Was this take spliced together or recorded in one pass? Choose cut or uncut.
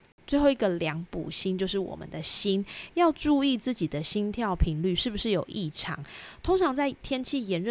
uncut